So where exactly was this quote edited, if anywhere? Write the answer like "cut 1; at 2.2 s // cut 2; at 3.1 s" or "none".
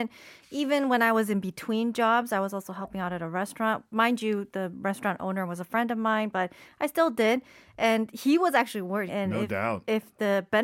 cut 1; at 9.1 s